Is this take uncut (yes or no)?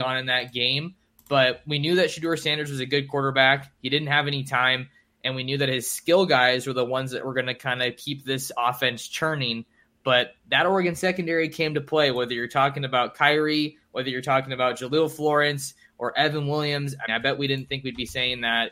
no